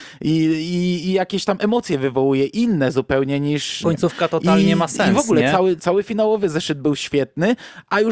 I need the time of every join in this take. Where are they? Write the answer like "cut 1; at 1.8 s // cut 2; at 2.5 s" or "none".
cut 1; at 3.8 s // cut 2; at 5.8 s